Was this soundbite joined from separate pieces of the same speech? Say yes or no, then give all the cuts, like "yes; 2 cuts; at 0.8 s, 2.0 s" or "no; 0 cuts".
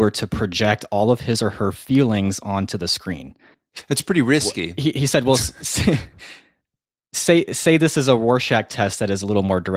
no; 0 cuts